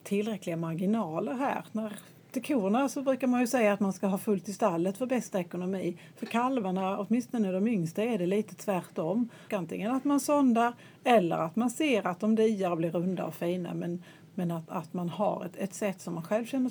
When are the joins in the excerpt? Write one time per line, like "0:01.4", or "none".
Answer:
0:09.5